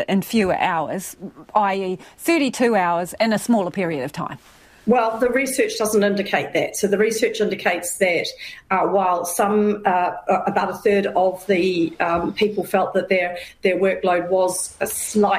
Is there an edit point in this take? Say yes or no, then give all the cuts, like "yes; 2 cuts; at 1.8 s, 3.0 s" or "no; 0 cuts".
yes; 1 cut; at 3.2 s